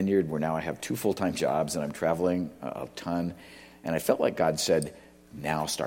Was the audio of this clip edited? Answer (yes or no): no